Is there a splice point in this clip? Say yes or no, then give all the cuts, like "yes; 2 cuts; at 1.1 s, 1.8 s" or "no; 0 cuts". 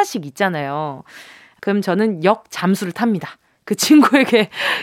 no; 0 cuts